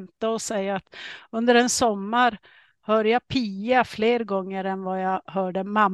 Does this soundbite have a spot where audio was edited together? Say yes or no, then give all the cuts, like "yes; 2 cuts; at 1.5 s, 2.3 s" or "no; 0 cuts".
no; 0 cuts